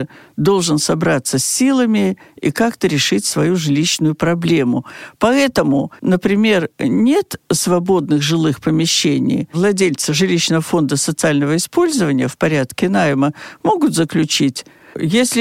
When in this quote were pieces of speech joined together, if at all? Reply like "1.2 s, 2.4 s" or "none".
6.0 s